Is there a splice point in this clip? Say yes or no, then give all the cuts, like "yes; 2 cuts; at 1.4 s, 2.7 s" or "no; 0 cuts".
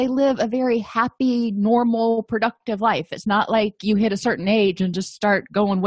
no; 0 cuts